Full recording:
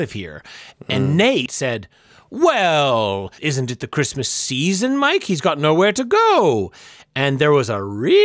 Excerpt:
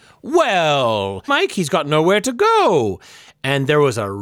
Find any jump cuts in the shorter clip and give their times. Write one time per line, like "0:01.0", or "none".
0:01.3